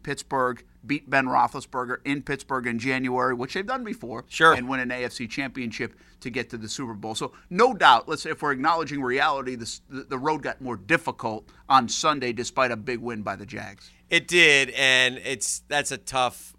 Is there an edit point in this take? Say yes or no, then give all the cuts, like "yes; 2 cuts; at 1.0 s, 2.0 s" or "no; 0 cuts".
yes; 1 cut; at 4.5 s